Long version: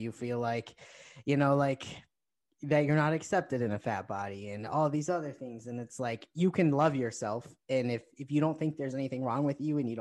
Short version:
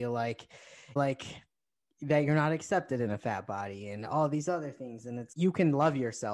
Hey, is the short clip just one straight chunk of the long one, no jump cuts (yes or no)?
no